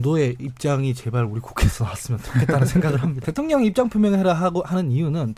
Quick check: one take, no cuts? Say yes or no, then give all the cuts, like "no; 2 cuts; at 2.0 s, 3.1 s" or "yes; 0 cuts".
no; 1 cut; at 3.2 s